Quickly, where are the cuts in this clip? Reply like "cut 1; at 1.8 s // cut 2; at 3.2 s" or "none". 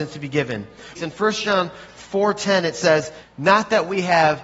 cut 1; at 0.9 s // cut 2; at 3.2 s